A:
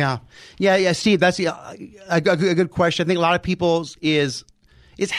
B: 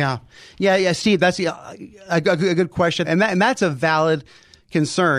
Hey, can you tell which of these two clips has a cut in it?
B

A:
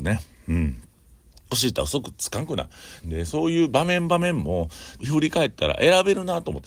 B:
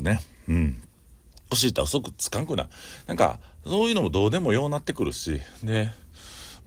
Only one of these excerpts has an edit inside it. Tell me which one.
A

